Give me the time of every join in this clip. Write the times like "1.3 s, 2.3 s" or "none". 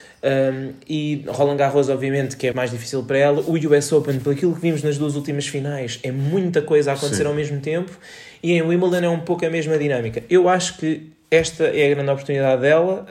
2.5 s